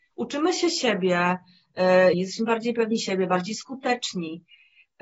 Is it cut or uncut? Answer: cut